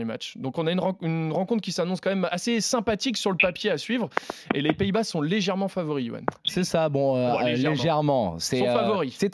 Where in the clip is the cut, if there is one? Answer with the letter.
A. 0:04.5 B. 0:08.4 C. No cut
C